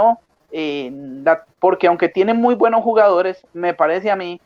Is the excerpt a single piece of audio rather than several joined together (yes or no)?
no